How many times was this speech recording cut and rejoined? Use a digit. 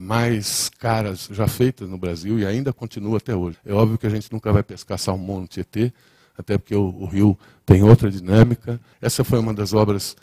2